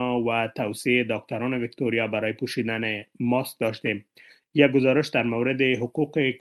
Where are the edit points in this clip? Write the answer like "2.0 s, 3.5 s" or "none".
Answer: none